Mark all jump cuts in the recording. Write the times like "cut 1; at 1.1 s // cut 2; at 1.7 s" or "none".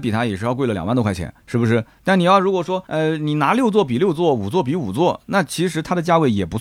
none